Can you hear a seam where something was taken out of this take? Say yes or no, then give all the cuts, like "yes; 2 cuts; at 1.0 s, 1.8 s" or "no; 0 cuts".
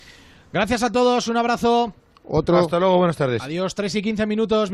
no; 0 cuts